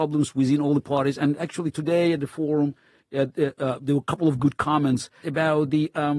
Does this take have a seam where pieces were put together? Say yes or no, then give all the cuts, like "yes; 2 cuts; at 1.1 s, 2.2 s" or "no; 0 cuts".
yes; 1 cut; at 5.2 s